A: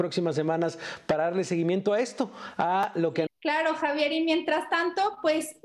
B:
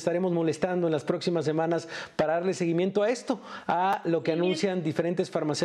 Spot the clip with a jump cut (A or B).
A